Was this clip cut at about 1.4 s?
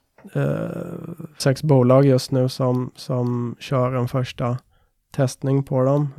yes; 1 cut; at 1.4 s

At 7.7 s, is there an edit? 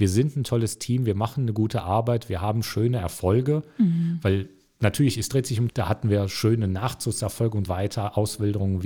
yes; 2 cuts; at 5.7 s, 7.7 s

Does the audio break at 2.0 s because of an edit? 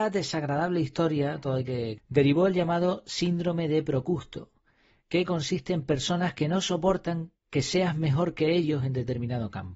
yes; 1 cut; at 2.0 s

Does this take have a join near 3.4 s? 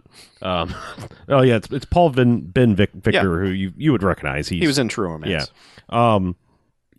no; 0 cuts

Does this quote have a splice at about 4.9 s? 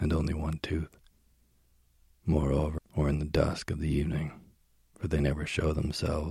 no; 1 cut; at 2.8 s

